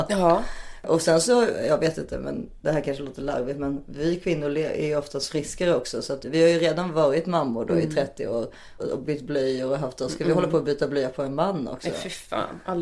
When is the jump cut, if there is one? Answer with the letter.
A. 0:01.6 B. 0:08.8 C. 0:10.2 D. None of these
B